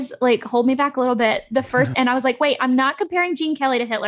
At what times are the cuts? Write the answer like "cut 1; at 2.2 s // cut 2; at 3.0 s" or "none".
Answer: cut 1; at 1.9 s